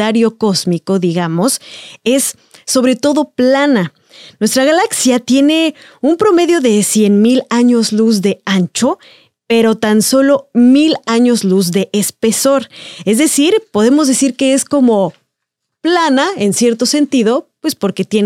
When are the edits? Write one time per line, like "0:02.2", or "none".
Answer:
none